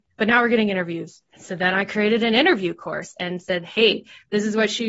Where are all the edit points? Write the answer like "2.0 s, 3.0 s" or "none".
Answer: 1.3 s